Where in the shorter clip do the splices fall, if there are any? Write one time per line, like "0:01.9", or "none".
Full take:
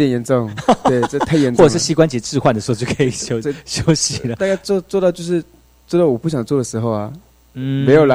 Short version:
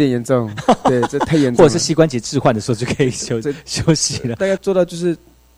0:04.6